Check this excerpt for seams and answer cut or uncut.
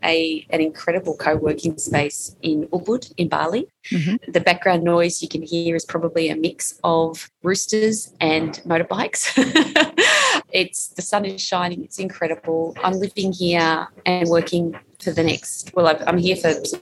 uncut